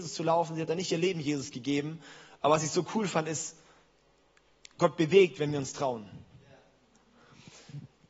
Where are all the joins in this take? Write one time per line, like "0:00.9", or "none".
none